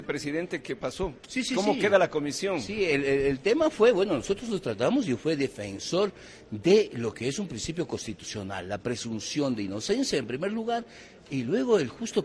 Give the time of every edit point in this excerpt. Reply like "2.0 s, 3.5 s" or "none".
1.2 s